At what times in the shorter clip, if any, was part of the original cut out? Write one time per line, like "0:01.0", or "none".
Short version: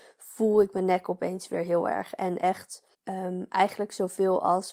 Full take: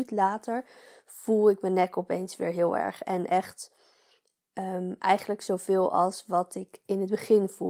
0:02.9

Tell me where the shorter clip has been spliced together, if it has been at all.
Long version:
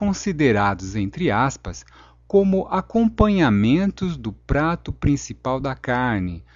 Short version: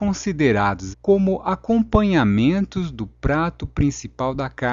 0:00.9

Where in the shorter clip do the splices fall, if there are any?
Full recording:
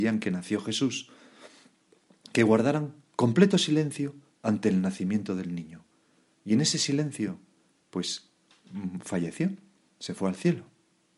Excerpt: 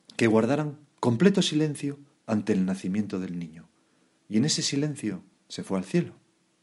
0:05.3

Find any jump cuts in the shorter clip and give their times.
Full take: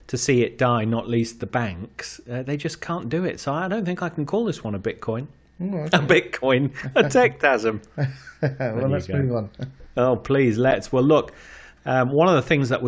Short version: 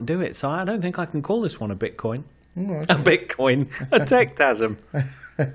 none

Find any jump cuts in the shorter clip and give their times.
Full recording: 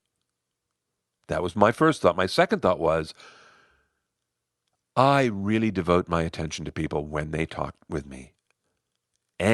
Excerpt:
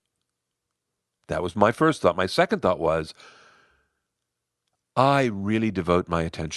none

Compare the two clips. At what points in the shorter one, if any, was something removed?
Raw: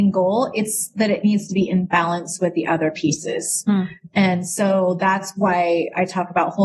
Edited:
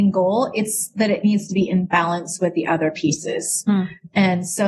none

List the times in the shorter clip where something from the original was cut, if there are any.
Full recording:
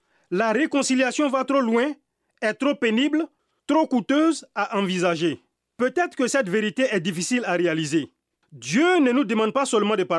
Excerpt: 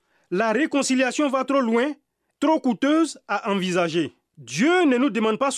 0:02.3
0:04.3

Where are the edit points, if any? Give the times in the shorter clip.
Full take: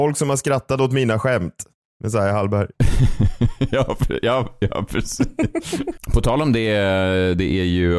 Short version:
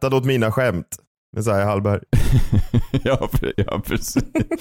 0:03.5

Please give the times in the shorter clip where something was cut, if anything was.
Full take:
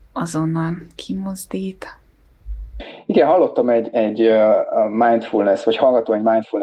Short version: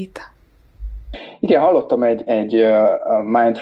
none

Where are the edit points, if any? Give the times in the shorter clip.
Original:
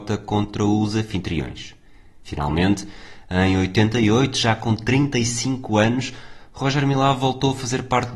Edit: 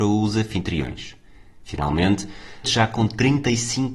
0:02.6

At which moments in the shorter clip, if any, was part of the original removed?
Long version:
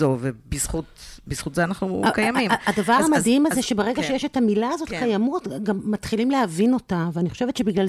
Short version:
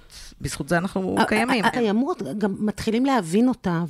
0:01.7

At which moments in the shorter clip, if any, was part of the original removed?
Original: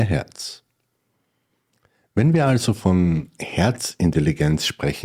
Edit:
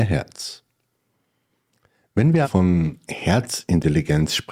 0:02.4

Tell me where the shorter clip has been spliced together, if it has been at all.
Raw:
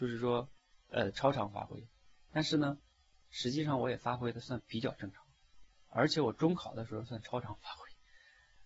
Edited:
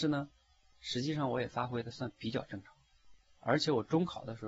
none

